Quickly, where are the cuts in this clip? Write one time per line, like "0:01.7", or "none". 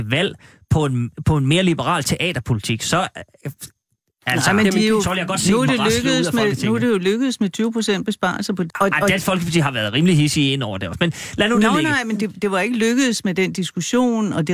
0:08.7

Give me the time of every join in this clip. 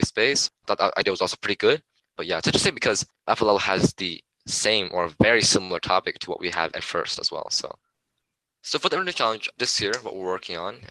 none

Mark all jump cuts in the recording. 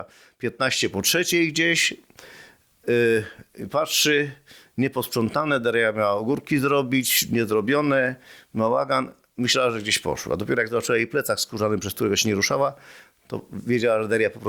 none

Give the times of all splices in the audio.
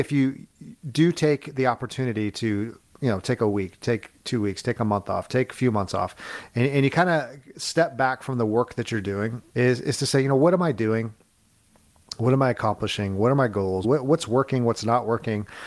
0:09.5
0:13.8

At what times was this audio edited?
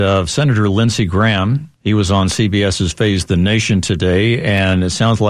0:01.7

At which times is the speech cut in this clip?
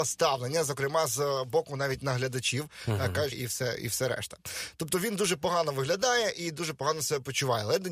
0:03.3

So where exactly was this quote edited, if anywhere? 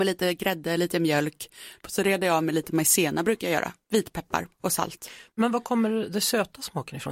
0:01.8

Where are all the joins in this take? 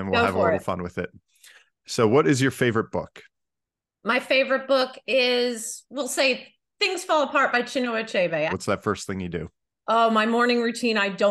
0:08.5

